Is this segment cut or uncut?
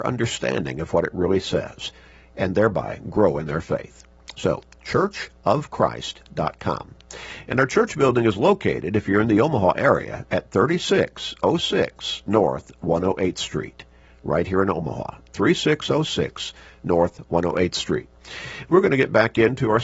uncut